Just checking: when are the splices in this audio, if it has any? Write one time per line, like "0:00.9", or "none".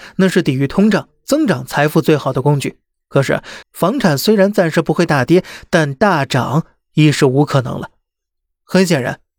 0:03.6